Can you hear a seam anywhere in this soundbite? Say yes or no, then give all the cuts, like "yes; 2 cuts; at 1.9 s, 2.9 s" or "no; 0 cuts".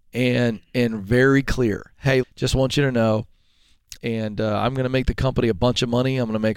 yes; 2 cuts; at 2.2 s, 4.0 s